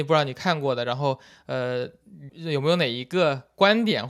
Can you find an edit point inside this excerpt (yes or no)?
yes